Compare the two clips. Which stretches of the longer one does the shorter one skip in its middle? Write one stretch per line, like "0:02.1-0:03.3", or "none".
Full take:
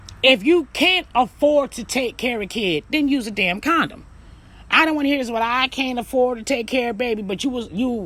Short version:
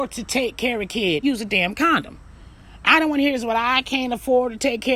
0:02.8-0:03.1